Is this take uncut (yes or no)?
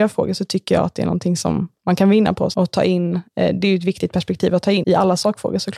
no